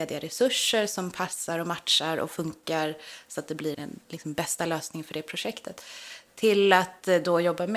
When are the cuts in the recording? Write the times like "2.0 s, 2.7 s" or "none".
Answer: 3.7 s